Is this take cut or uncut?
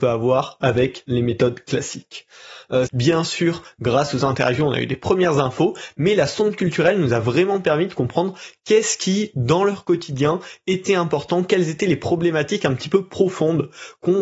cut